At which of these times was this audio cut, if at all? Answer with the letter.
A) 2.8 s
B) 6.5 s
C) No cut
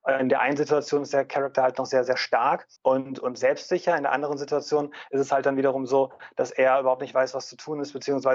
A